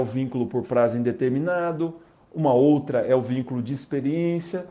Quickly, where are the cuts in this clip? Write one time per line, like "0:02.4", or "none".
none